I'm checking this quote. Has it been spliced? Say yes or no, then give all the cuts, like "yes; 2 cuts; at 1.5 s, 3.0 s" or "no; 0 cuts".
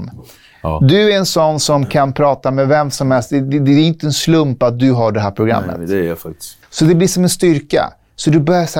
yes; 1 cut; at 6.6 s